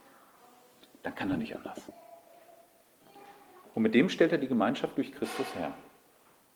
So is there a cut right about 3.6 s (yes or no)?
yes